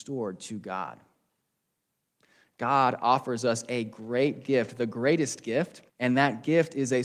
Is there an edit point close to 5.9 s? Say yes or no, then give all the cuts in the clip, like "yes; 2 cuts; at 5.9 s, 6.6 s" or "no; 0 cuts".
yes; 1 cut; at 5.9 s